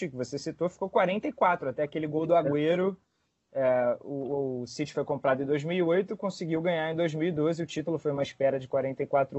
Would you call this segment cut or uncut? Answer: uncut